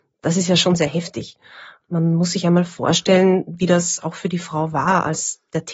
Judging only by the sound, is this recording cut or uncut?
uncut